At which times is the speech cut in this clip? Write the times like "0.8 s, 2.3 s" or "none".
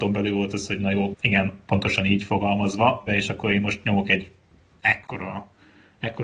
1.1 s, 3.1 s